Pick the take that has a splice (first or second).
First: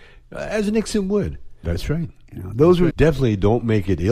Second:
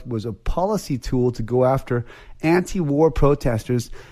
first